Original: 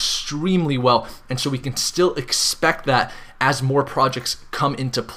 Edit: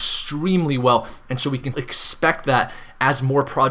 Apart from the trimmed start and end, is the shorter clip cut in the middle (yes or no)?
yes